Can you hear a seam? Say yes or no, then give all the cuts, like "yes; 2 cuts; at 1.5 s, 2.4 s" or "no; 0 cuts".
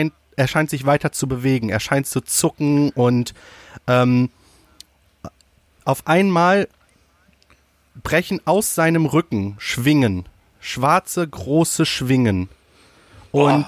no; 0 cuts